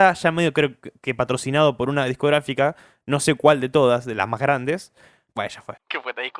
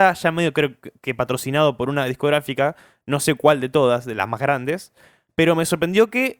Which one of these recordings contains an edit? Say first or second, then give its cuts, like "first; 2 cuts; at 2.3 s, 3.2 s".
first; 1 cut; at 5.3 s